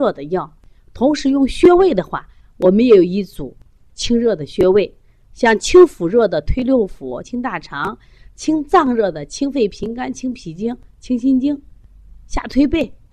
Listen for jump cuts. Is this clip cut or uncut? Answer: cut